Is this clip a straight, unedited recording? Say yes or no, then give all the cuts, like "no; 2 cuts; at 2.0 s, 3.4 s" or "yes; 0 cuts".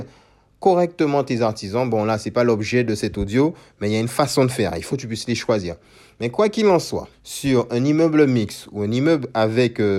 no; 2 cuts; at 4.9 s, 7.1 s